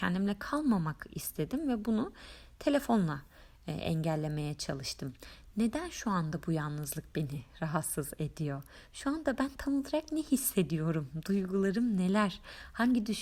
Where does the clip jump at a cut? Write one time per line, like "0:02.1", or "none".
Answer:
none